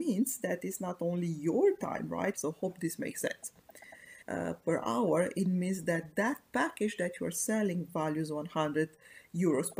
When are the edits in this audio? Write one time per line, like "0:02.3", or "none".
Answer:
0:02.3
0:04.2